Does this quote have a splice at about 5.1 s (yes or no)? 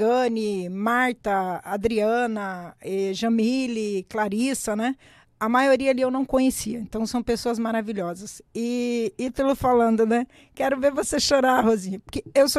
no